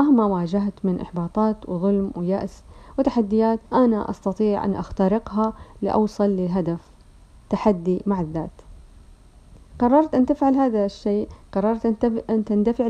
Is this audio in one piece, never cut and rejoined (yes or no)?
no